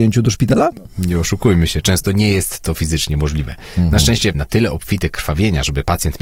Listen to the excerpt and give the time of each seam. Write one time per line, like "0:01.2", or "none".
0:04.3